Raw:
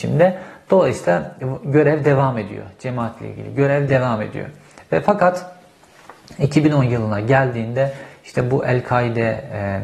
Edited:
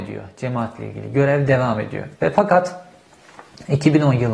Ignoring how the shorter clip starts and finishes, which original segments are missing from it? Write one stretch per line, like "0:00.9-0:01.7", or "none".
0:04.6-0:04.9